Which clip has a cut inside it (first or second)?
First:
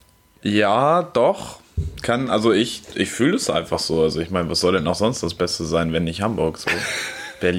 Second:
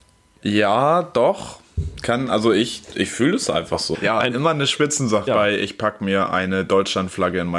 second